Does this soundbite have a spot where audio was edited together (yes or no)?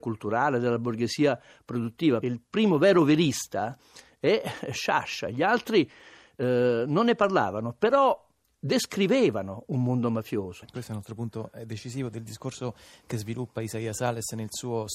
yes